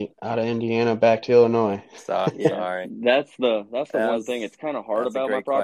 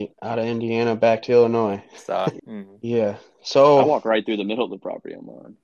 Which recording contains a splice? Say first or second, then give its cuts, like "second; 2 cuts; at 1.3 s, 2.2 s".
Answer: second; 1 cut; at 2.4 s